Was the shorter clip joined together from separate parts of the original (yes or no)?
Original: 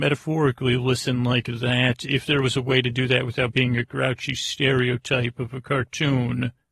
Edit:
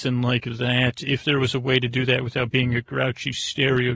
no